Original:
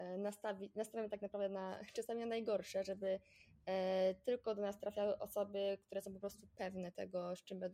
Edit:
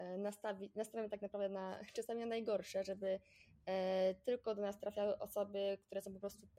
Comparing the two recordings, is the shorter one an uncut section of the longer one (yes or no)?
yes